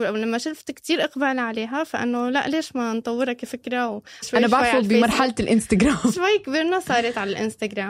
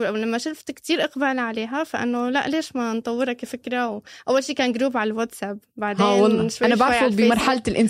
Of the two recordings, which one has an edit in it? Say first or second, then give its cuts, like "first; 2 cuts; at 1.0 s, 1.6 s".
first; 2 cuts; at 4.2 s, 6.1 s